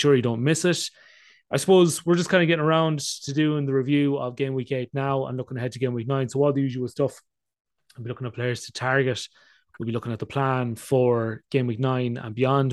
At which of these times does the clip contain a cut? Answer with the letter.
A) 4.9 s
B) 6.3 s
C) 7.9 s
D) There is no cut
D